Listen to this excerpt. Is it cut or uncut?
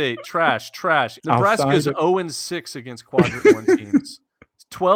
cut